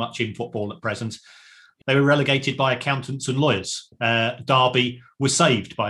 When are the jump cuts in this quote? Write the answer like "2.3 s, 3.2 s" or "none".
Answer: 1.8 s